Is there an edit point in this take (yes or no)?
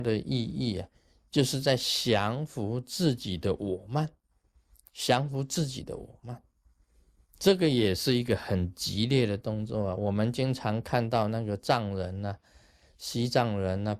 no